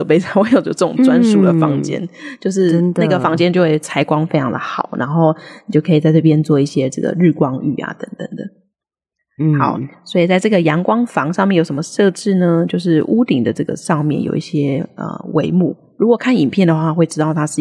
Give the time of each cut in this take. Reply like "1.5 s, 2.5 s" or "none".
none